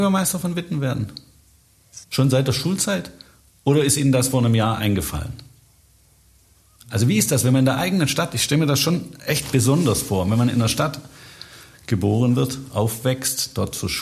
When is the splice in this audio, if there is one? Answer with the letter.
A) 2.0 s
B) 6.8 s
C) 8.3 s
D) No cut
A